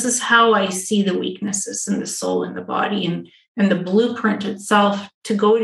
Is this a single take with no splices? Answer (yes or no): yes